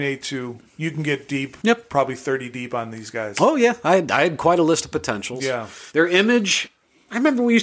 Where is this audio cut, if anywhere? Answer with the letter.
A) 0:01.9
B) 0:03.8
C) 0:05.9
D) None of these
C